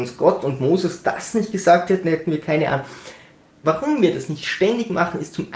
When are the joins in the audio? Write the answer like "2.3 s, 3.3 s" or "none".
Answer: 3.6 s